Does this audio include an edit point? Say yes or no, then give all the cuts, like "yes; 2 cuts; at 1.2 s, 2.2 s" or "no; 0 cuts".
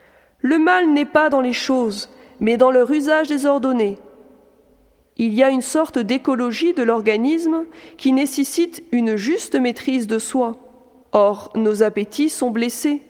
yes; 1 cut; at 11.0 s